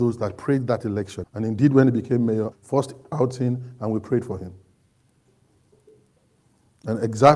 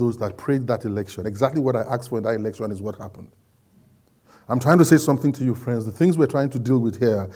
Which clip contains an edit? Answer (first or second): first